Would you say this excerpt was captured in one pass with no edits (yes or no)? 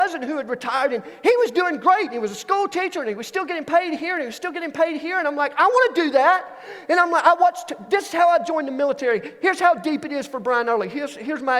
yes